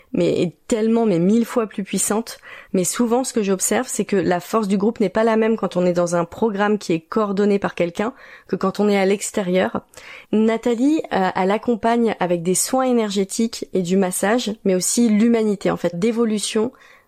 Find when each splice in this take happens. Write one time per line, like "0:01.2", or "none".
0:02.7
0:10.2
0:15.9